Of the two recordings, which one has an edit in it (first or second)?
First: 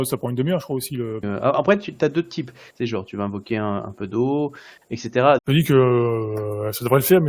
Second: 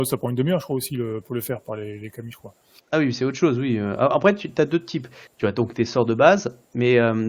first